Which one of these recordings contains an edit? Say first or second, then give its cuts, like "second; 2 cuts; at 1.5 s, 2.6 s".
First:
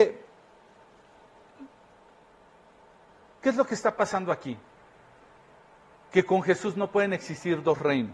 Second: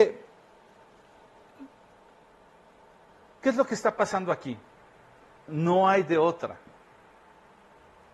second; 1 cut; at 5.5 s